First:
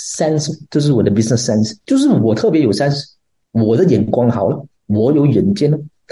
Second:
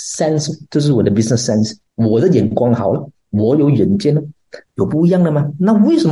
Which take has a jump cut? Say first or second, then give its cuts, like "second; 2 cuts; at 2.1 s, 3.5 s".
second; 2 cuts; at 1.8 s, 4.6 s